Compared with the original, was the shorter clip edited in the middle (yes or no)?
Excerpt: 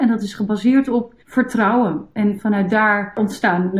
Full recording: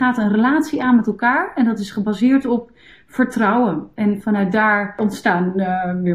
yes